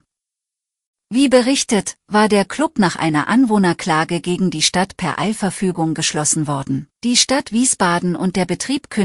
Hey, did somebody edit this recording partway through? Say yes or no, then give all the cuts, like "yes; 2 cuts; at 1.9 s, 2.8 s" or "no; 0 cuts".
yes; 1 cut; at 6.9 s